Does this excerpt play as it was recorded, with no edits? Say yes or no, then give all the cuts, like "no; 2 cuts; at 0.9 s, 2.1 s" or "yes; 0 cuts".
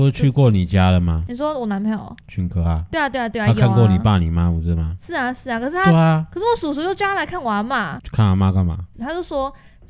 no; 1 cut; at 8.9 s